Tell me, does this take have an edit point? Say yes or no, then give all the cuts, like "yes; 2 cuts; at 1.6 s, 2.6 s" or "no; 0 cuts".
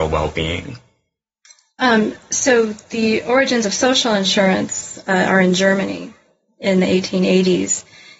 no; 0 cuts